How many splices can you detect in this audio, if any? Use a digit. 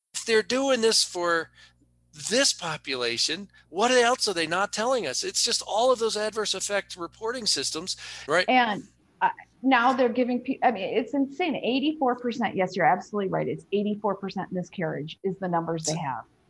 1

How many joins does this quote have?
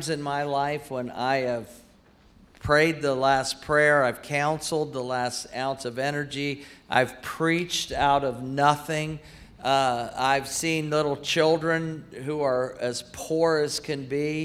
0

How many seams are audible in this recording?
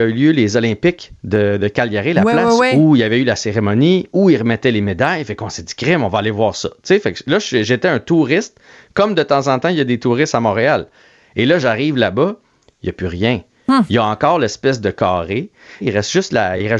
1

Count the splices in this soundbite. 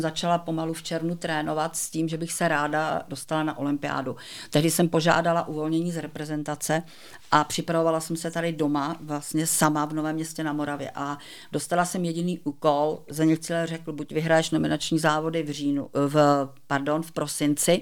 0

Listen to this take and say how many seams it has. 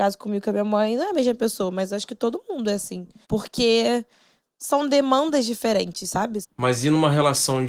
2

